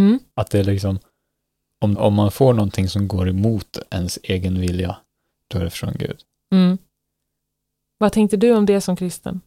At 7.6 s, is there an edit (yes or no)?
no